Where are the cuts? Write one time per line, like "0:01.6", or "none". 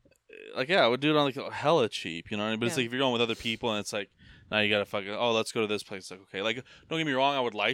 none